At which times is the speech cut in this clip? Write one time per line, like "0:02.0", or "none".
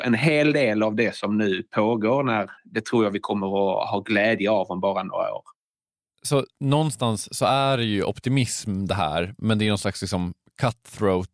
0:02.6